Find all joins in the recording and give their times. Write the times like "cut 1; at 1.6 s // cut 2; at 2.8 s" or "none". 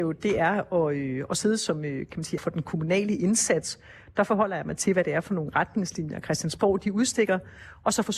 cut 1; at 2.4 s